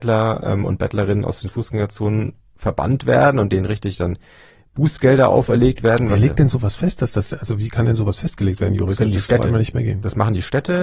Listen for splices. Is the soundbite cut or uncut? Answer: uncut